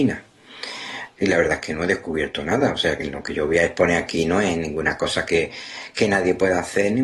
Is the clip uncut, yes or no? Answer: no